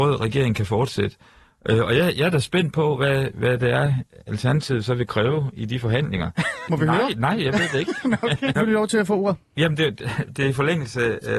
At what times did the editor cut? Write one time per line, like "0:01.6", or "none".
0:06.7
0:08.6